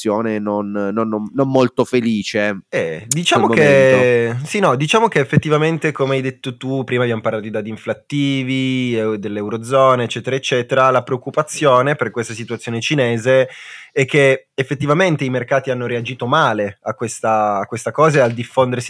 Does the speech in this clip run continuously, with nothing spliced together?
yes; 0 cuts

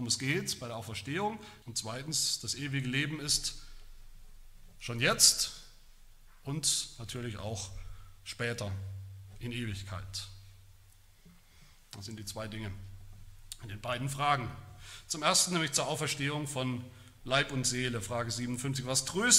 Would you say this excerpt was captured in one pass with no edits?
no; 1 cut; at 1.6 s

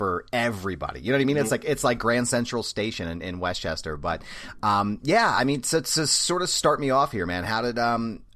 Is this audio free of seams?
yes; 0 cuts

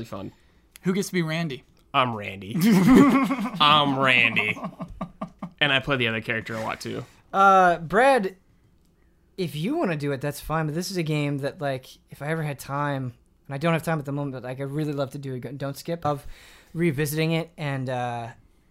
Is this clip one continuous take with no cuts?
no; 1 cut; at 16.0 s

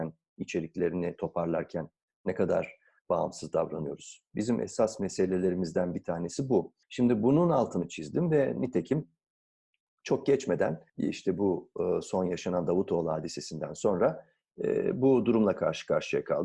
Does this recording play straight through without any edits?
no; 2 cuts; at 6.8 s, 10.9 s

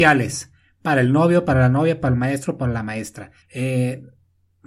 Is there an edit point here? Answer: yes; 1 cut; at 3.4 s

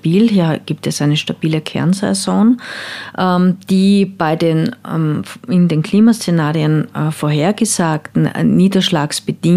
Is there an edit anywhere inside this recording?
no; 0 cuts

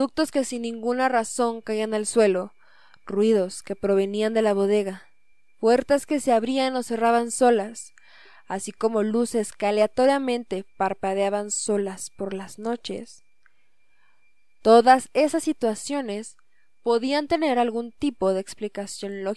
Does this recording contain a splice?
no; 0 cuts

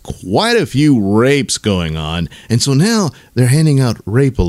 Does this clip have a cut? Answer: no; 0 cuts

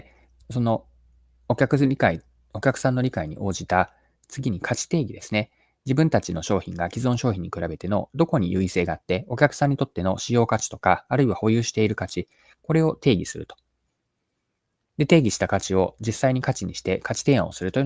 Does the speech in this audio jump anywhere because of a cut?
no; 0 cuts

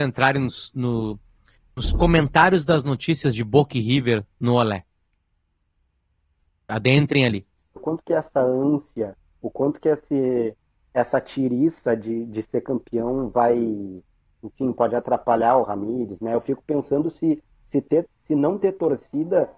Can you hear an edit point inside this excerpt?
yes; 1 cut; at 7.8 s

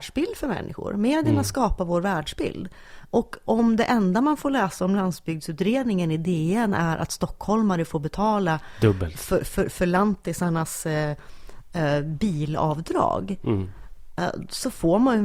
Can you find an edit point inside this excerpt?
no; 0 cuts

